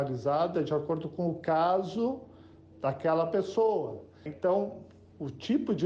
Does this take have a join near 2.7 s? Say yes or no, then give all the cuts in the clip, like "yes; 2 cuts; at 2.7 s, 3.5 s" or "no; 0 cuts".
no; 1 cut; at 4.3 s